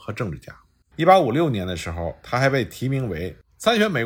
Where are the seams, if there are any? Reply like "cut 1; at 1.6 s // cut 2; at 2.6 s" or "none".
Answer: cut 1; at 0.9 s